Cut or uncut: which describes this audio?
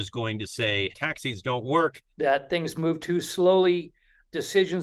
cut